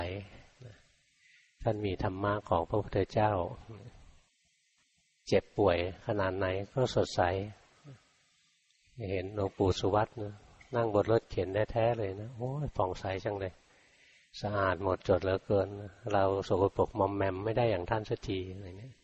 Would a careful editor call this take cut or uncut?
uncut